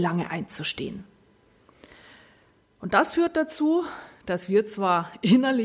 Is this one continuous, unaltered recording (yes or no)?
yes